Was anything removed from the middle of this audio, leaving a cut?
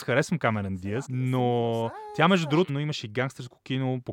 yes; 2 cuts; at 1.0 s, 2.7 s

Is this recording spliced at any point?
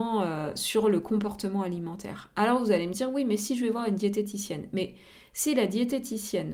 no; 0 cuts

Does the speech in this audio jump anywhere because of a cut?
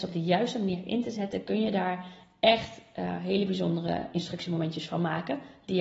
no; 0 cuts

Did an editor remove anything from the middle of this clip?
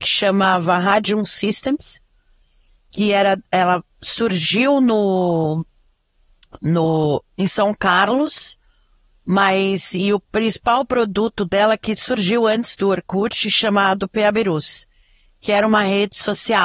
no; 0 cuts

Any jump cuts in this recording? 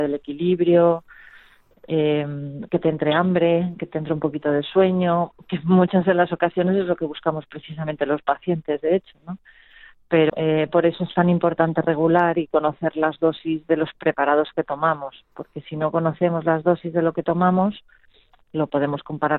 yes; 1 cut; at 10.3 s

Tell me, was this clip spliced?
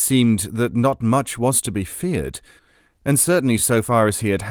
no; 0 cuts

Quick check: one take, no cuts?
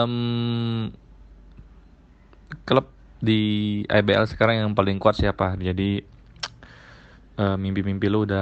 no; 1 cut; at 5.6 s

